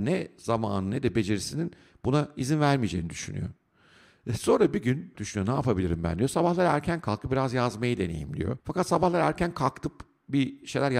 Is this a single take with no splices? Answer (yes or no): no